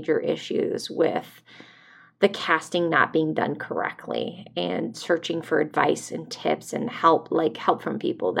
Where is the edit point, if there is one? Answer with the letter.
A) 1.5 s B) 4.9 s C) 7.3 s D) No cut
B